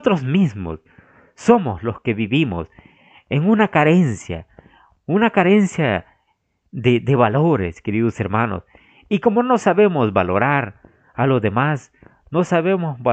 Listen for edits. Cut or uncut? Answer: uncut